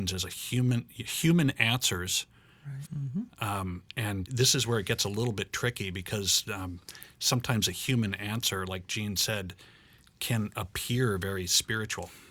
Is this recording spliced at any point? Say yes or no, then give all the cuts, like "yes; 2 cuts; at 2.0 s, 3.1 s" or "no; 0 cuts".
yes; 2 cuts; at 2.8 s, 4.2 s